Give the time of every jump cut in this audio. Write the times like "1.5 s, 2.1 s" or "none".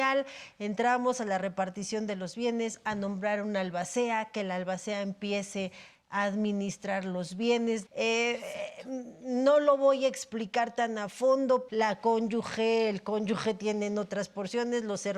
7.9 s, 11.7 s